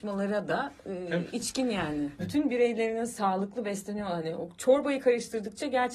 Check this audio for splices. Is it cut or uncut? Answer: cut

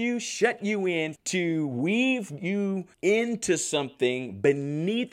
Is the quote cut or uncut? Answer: cut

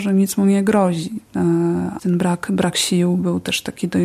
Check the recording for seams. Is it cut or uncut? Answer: cut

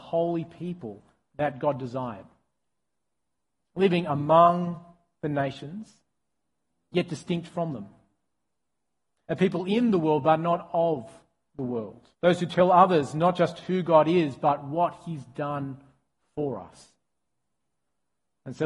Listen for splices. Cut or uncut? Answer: cut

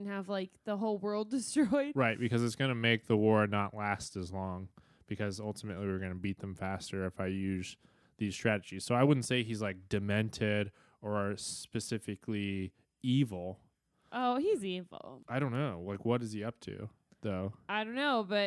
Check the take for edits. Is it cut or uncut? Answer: uncut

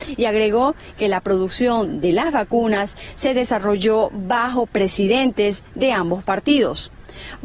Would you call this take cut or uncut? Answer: uncut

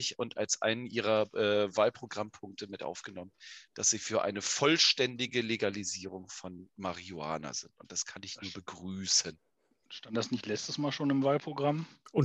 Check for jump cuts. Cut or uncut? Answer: uncut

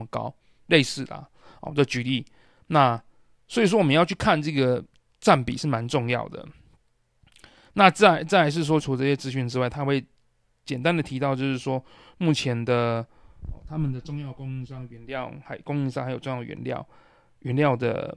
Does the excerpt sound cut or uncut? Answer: cut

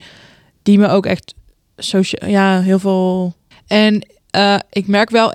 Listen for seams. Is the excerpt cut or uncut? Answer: cut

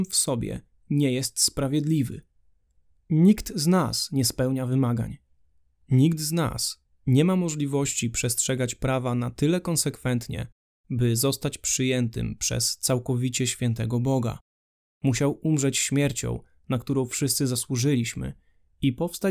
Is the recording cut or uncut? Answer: cut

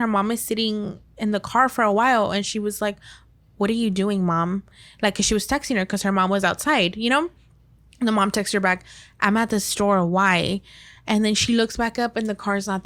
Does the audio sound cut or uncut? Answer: uncut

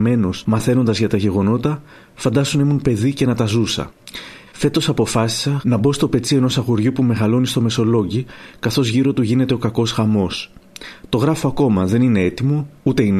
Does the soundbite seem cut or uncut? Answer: cut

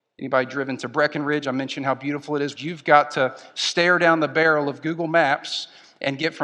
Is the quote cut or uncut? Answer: cut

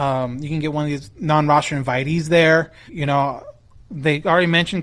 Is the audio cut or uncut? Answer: cut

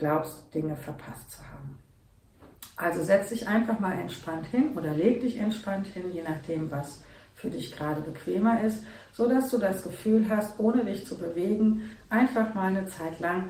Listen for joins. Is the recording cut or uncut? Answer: uncut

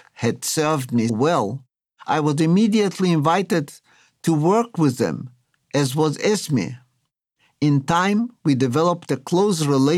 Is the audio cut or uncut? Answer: cut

